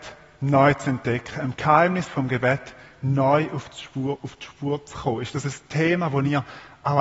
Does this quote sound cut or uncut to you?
uncut